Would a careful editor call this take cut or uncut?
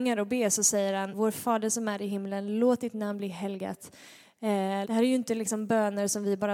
cut